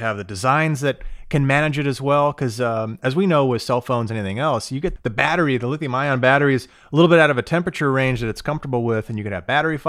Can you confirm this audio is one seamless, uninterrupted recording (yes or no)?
no